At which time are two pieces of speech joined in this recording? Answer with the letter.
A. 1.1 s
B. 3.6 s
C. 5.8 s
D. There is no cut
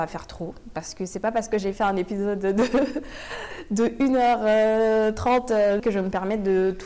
C